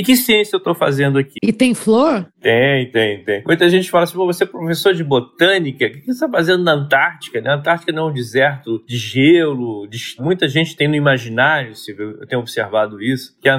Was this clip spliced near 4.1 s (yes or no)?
no